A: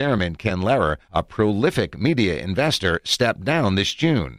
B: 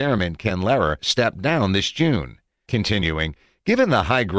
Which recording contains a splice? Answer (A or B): B